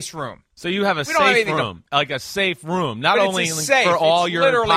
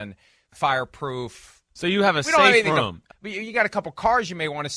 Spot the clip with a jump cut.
second; 2 cuts; at 1.7 s, 3.1 s

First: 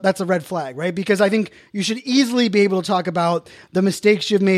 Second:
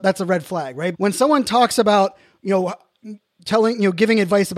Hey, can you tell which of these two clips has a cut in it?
second; 1 cut; at 0.9 s

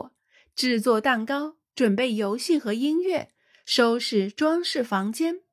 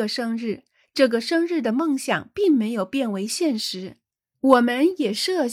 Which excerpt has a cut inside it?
second; 1 cut; at 4.3 s

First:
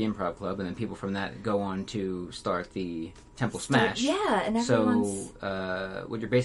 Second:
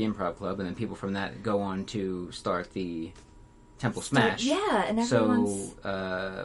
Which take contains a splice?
first; 1 cut; at 3.3 s

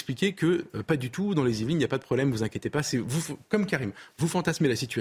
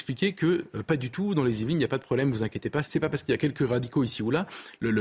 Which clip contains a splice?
second; 1 cut; at 2.8 s

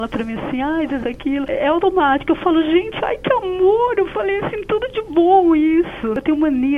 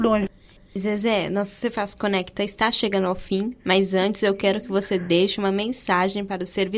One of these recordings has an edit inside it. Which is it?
first; 1 cut; at 1.0 s

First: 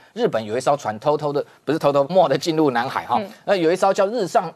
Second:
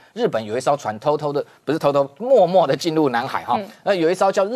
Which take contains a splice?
first; 1 cut; at 2.1 s

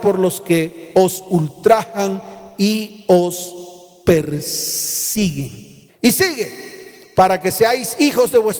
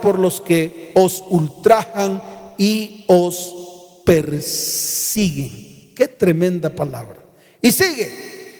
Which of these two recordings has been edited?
first; 1 cut; at 5.9 s

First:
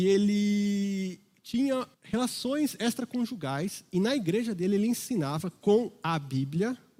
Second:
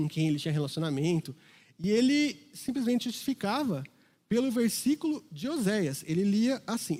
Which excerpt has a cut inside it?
first; 1 cut; at 1.9 s

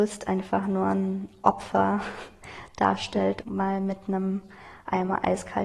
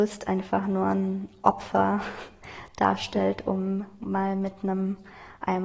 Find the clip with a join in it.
first; 1 cut; at 3.4 s

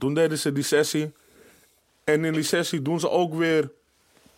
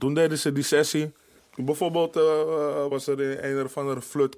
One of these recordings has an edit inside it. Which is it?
second; 2 cuts; at 1.4 s, 2.9 s

